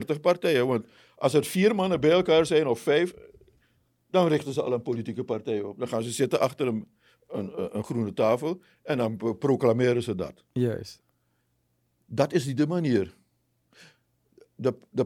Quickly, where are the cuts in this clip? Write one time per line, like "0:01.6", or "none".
none

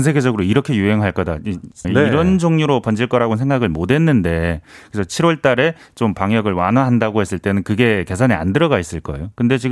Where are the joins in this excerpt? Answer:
0:01.8

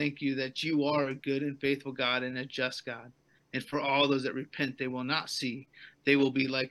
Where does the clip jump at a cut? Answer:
none

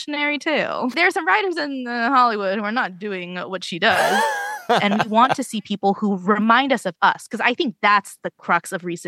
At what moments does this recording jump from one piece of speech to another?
0:00.9

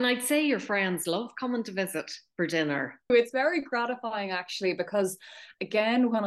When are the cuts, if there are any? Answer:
0:03.1

